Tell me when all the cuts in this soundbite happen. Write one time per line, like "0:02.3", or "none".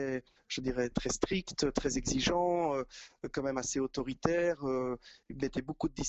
0:00.9